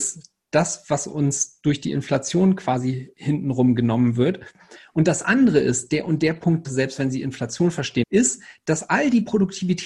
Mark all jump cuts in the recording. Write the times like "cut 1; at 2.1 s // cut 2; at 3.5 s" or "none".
cut 1; at 6.6 s // cut 2; at 8.0 s